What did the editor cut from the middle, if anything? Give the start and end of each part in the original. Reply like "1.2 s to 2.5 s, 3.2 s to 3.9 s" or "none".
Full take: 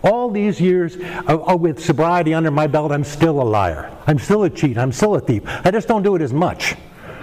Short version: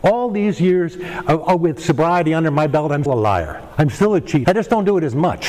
3.1 s to 3.3 s, 4.7 s to 5.6 s